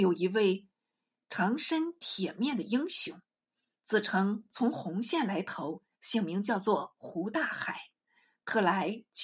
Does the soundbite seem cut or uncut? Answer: uncut